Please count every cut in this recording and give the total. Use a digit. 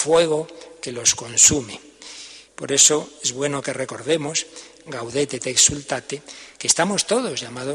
2